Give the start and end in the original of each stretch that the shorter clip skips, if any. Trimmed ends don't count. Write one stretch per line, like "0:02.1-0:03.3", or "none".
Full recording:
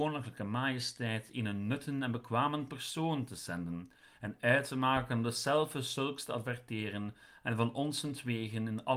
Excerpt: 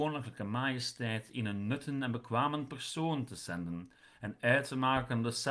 none